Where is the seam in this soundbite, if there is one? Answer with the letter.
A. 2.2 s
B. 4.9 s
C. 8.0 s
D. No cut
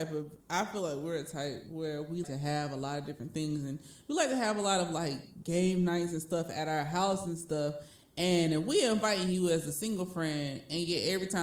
A